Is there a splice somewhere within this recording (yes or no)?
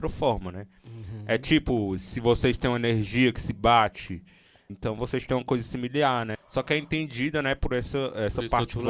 yes